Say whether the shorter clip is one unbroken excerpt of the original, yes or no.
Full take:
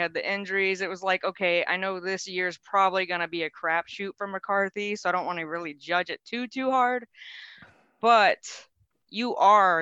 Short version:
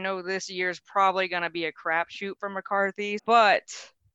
no